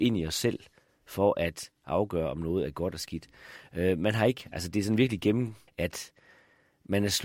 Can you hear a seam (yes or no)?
yes